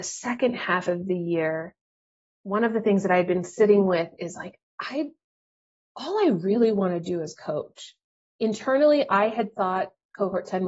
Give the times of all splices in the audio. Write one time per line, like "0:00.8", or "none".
0:08.2